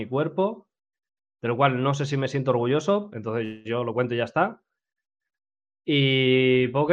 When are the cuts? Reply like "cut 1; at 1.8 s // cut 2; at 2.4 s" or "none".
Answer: cut 1; at 3.1 s